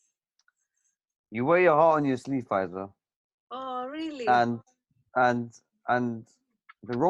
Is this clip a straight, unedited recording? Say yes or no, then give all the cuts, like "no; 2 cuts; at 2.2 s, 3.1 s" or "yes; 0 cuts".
yes; 0 cuts